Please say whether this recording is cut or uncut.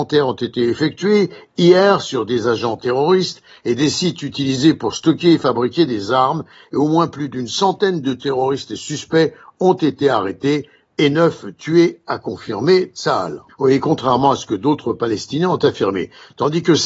cut